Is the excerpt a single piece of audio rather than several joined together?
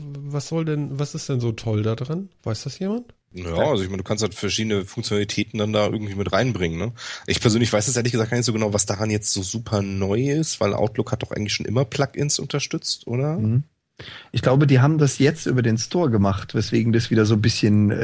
no; 1 cut; at 3.2 s

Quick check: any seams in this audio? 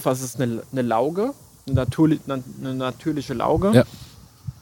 no; 0 cuts

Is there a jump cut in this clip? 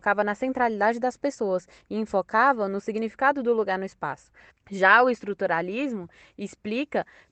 yes; 1 cut; at 4.5 s

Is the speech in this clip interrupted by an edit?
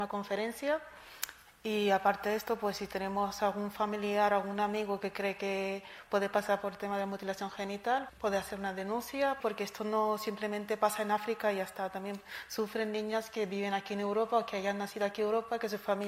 yes; 2 cuts; at 8.1 s, 9.4 s

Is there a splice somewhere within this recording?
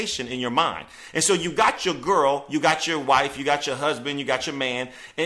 no; 0 cuts

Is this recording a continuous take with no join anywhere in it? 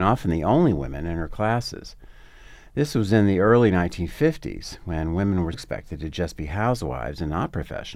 no; 1 cut; at 5.5 s

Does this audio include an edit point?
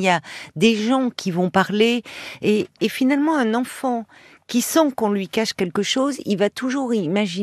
no; 0 cuts

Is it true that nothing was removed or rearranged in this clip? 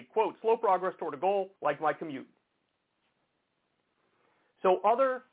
no; 1 cut; at 1.6 s

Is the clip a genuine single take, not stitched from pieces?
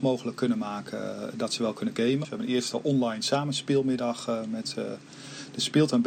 no; 1 cut; at 2.2 s

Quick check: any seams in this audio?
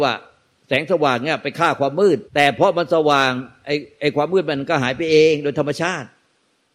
yes; 1 cut; at 2.3 s

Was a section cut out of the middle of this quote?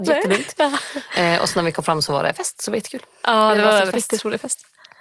no; 0 cuts

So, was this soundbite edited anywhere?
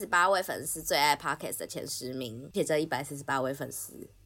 yes; 1 cut; at 2.5 s

